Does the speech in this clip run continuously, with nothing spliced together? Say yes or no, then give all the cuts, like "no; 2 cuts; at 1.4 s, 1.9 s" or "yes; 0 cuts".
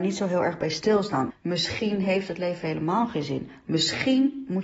no; 1 cut; at 1.3 s